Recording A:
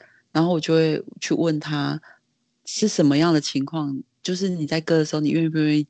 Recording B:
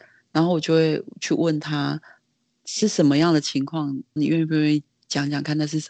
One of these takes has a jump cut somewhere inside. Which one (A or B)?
B